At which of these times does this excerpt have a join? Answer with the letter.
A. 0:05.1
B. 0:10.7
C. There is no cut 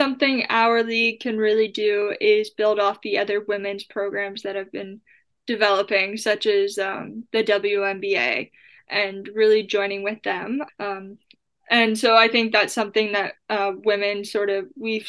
B